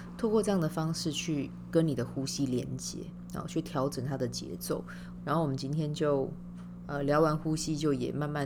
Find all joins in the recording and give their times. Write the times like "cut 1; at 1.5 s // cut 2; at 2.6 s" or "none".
cut 1; at 5.2 s

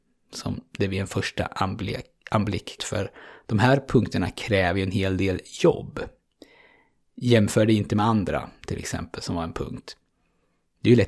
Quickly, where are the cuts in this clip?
cut 1; at 2.8 s

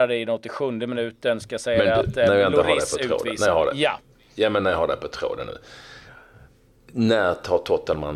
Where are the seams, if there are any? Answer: none

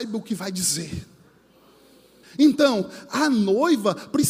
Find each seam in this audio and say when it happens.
cut 1; at 2.2 s

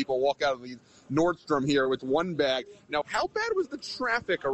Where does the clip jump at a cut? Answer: cut 1; at 2.0 s // cut 2; at 3.0 s

